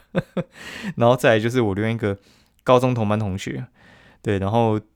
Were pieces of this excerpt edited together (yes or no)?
no